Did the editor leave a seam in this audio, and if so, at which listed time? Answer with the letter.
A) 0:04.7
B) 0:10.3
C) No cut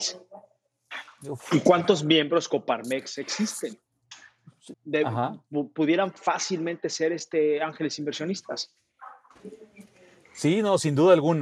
A